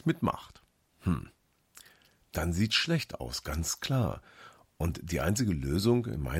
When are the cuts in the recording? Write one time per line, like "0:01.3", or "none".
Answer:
none